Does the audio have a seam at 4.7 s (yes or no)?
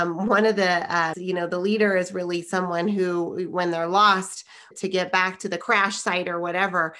yes